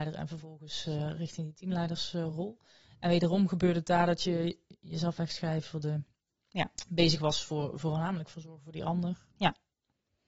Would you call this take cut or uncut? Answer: uncut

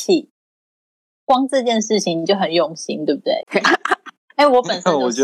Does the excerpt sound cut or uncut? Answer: cut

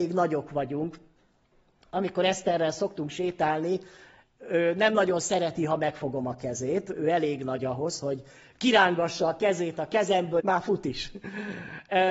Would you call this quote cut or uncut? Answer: cut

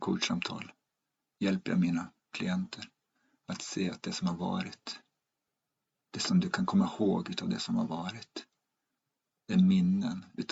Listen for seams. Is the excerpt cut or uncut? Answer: uncut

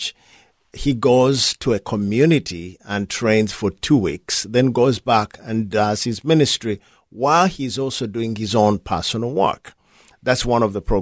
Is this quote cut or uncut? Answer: uncut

